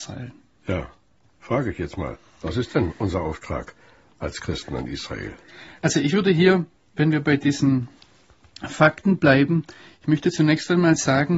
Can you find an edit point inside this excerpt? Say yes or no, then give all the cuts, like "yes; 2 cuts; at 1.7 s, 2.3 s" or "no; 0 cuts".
no; 0 cuts